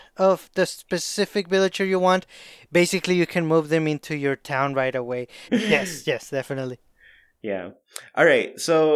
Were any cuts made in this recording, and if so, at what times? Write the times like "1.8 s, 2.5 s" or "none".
5.5 s